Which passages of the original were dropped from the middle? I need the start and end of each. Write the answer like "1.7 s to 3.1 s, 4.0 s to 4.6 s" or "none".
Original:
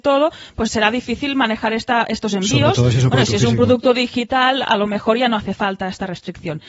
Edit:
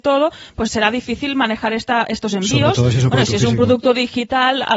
none